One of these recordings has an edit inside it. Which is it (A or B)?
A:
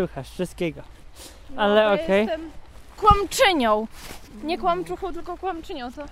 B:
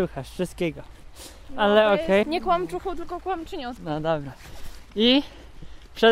B